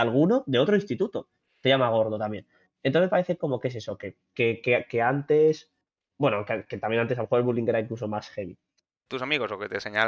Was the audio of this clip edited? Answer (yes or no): yes